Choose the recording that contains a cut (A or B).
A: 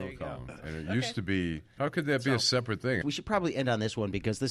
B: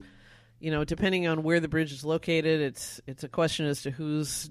A